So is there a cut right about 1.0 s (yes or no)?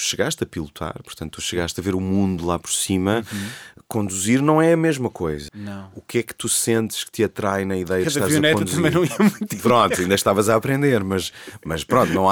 no